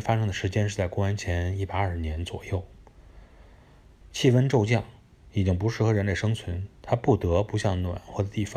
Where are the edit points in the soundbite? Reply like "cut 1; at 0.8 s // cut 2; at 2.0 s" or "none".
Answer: cut 1; at 4.0 s // cut 2; at 6.8 s